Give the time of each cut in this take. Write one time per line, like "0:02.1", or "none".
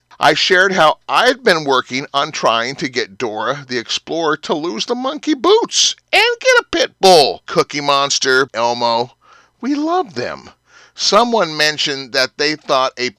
0:07.4
0:08.5

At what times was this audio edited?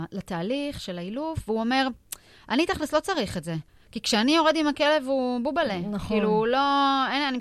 none

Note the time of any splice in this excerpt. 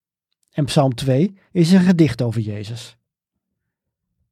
0:01.5

